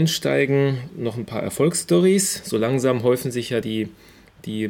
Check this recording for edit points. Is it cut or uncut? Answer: uncut